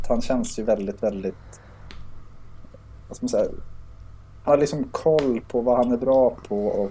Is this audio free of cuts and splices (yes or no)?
no